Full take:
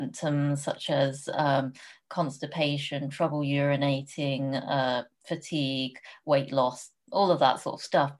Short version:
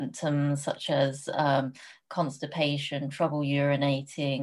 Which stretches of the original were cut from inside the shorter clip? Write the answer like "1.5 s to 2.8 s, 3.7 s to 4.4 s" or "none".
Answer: none